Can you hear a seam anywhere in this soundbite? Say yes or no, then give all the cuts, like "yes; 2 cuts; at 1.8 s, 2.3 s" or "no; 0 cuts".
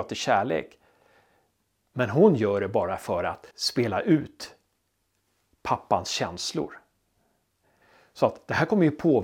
yes; 1 cut; at 3.5 s